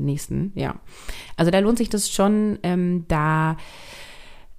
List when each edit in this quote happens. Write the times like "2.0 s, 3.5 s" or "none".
none